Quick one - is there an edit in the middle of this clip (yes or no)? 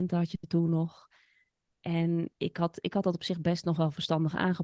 no